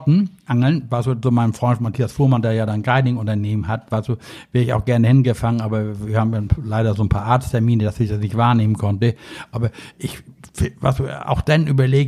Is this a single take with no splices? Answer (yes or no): yes